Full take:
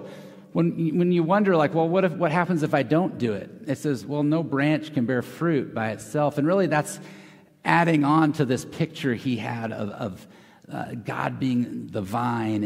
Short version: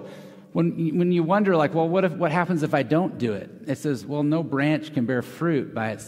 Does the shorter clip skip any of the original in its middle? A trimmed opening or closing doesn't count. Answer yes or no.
no